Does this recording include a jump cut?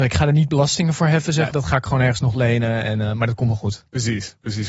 yes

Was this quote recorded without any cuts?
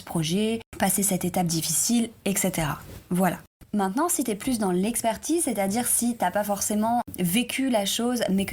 yes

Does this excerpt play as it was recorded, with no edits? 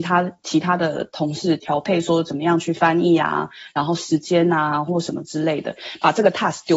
no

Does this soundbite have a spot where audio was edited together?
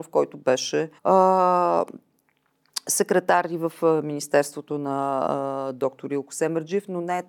yes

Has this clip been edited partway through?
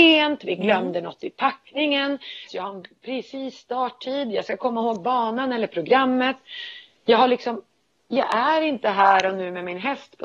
yes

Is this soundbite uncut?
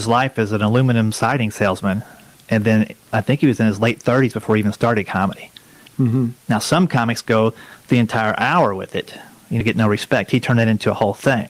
no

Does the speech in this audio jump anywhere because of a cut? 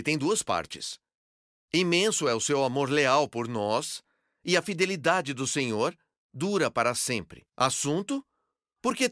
yes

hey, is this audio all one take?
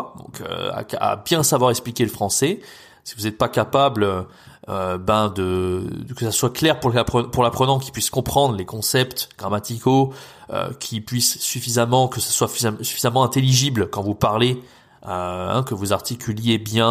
yes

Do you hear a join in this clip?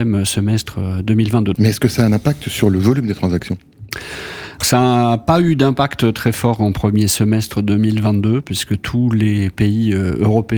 yes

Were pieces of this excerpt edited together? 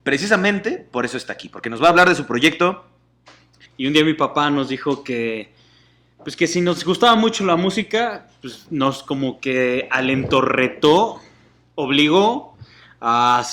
yes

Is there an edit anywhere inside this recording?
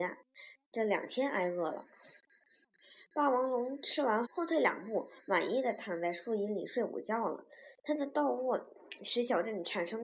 yes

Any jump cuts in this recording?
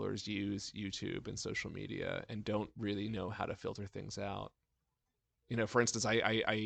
no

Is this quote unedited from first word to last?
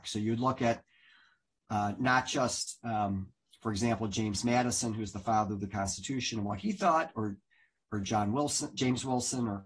yes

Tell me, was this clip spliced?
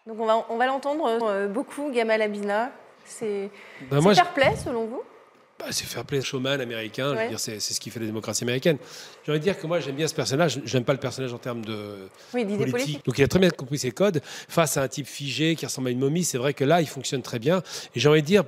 yes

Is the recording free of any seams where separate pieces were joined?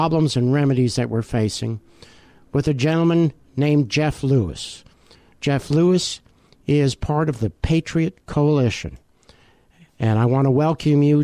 yes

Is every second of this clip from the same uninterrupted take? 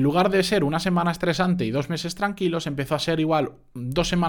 yes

